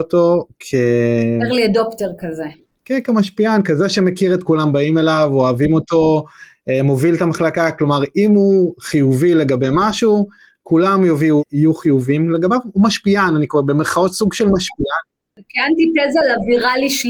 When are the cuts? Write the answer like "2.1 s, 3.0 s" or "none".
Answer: 4.4 s